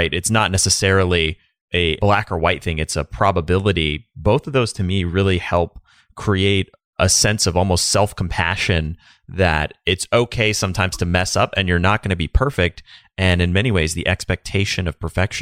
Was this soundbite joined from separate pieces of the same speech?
no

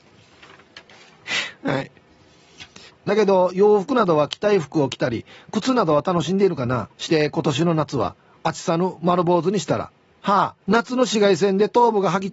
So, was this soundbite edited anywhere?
yes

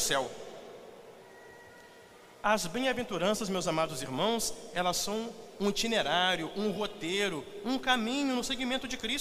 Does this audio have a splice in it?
no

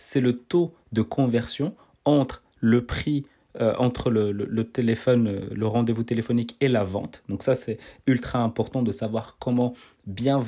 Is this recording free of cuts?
yes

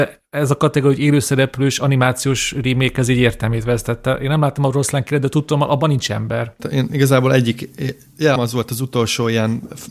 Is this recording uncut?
no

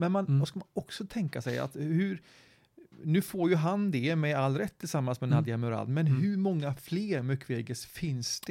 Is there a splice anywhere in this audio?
no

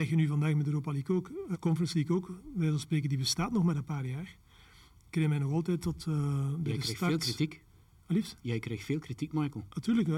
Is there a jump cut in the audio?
yes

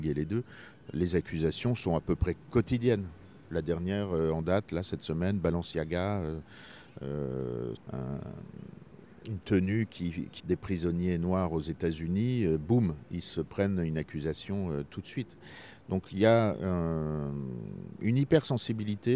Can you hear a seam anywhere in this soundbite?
yes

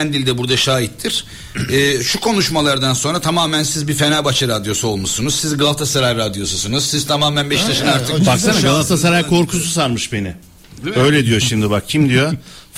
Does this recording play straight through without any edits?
yes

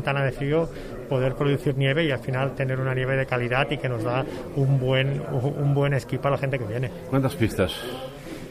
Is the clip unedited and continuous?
yes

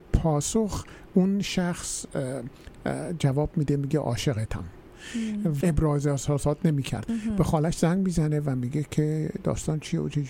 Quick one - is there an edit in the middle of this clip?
yes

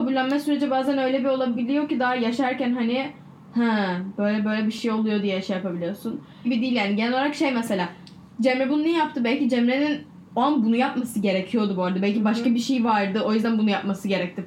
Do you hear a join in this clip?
yes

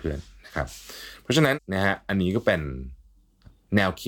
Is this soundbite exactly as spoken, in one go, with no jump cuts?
no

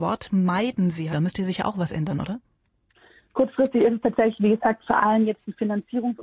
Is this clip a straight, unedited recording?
no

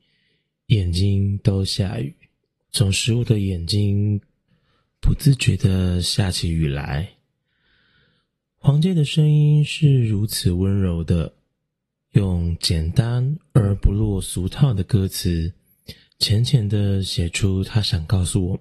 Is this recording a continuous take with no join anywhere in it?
no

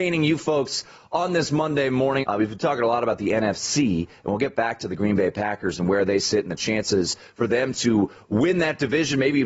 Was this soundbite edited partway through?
yes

